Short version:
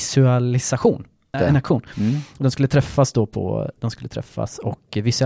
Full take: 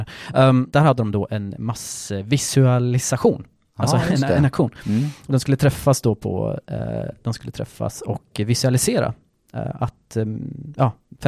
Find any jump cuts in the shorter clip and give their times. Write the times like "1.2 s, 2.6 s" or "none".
1.3 s, 3.8 s